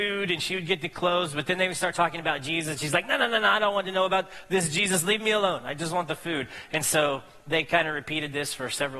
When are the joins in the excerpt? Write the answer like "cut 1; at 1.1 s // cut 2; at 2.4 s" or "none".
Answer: none